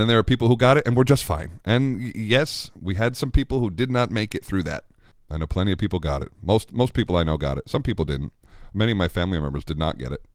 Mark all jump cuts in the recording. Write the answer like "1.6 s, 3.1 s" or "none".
5.1 s